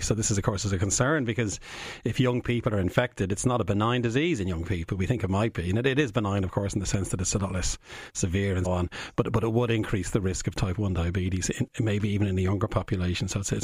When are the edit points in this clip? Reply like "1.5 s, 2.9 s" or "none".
8.6 s